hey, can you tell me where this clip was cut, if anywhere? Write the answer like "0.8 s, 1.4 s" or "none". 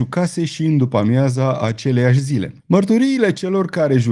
2.6 s